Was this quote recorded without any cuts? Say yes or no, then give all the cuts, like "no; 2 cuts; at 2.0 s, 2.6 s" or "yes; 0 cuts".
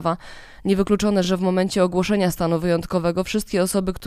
yes; 0 cuts